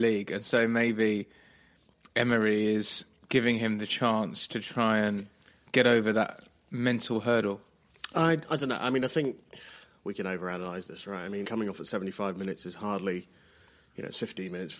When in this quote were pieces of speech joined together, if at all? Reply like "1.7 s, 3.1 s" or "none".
11.4 s